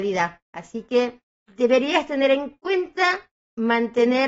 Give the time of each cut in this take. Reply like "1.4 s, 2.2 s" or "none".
1.4 s